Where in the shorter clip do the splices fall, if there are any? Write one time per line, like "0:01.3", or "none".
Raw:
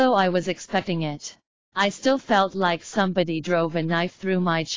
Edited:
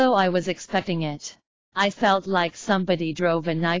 0:01.9